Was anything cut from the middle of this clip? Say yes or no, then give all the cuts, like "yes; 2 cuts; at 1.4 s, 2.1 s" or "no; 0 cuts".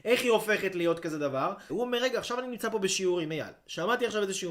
yes; 1 cut; at 1.7 s